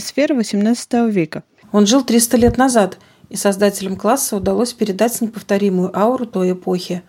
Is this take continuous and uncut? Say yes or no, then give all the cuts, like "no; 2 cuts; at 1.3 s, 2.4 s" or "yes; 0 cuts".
no; 1 cut; at 1.6 s